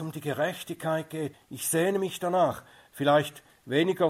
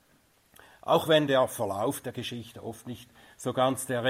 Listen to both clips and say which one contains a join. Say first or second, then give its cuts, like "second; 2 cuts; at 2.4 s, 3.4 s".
first; 1 cut; at 1.3 s